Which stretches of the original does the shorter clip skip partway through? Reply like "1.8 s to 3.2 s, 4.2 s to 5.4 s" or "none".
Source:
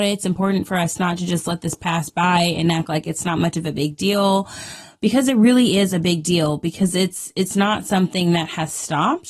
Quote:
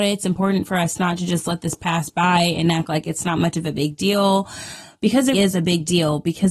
5.3 s to 5.7 s